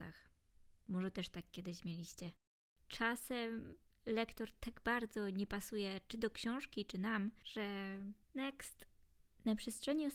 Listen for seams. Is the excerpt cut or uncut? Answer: cut